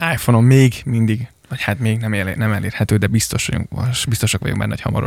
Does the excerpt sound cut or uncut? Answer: uncut